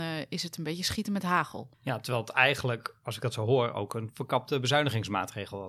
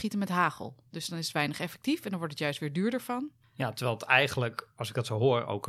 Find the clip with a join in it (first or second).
first